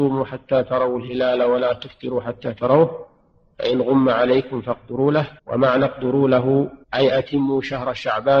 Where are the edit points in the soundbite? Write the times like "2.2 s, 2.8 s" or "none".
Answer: 5.4 s, 6.8 s